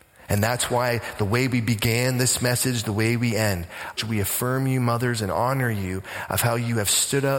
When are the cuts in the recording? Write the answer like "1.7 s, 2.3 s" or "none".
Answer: 4.0 s